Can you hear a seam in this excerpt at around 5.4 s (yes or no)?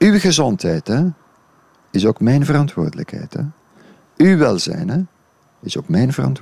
no